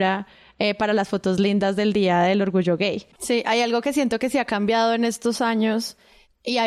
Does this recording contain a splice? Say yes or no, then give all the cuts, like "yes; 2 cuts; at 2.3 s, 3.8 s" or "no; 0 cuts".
yes; 1 cut; at 3.1 s